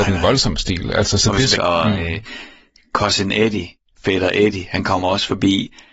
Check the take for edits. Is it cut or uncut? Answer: cut